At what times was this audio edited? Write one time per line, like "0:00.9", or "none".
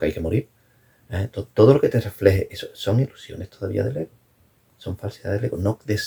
none